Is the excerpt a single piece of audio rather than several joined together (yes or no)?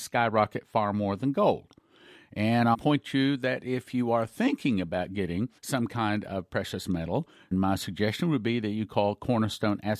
no